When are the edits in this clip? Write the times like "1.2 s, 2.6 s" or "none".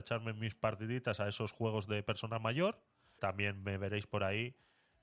3.2 s